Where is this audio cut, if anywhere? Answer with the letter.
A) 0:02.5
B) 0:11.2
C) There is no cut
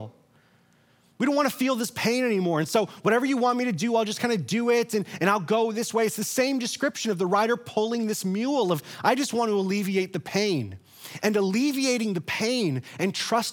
C